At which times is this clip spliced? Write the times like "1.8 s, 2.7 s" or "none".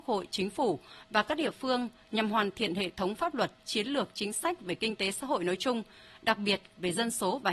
none